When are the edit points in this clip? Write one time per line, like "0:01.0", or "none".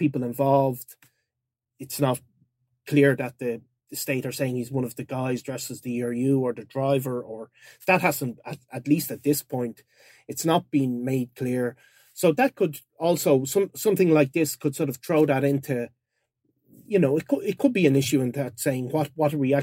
none